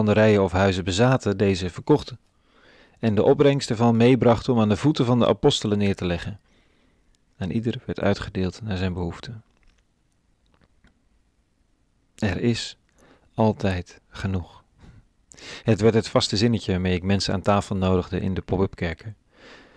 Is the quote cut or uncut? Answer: uncut